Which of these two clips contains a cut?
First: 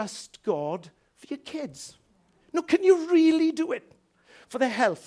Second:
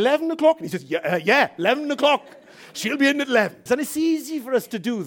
second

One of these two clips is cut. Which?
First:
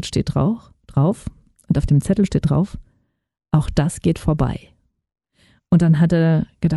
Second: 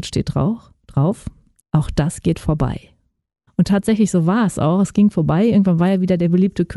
second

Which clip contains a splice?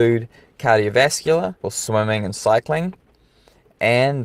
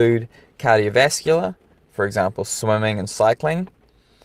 first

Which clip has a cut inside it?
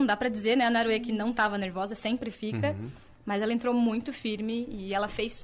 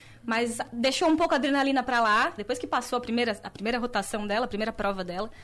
second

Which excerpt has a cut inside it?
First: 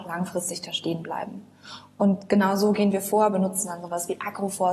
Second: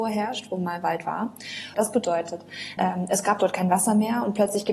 second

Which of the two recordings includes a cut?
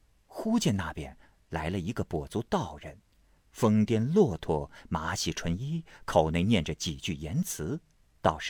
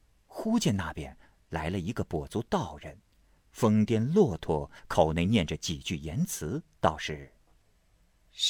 second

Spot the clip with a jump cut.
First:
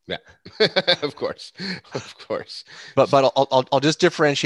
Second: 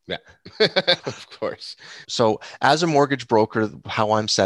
second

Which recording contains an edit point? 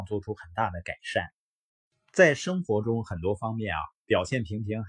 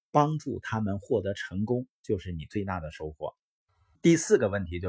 second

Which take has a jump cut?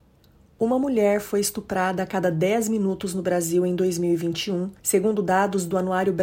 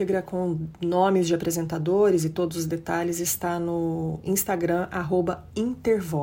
first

